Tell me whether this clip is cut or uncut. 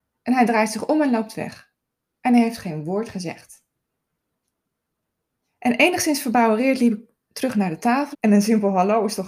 cut